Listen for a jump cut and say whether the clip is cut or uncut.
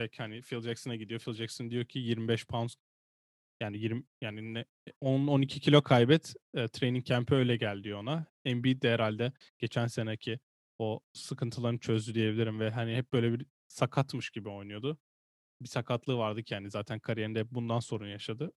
uncut